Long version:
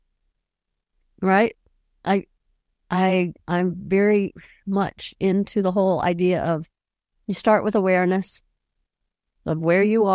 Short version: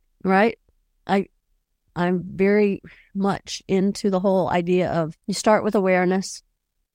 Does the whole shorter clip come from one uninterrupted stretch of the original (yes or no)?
no